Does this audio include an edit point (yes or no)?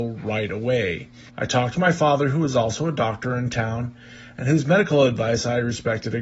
yes